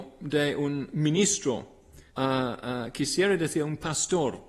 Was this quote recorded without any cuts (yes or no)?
no